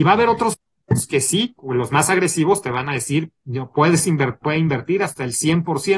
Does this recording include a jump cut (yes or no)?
no